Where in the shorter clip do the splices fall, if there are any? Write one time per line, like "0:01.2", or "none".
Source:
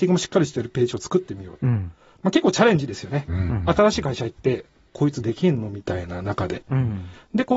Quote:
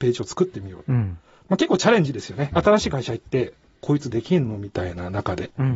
0:02.5